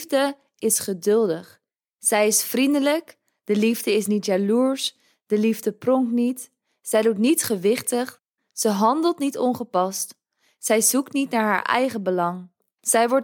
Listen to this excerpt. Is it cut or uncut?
uncut